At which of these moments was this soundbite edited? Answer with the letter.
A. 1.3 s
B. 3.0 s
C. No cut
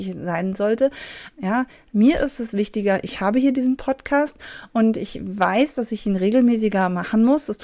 A